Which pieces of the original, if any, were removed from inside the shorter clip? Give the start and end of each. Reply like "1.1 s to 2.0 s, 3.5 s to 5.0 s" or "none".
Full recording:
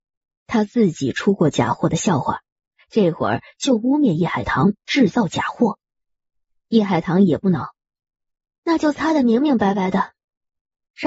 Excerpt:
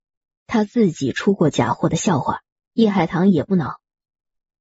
2.7 s to 6.7 s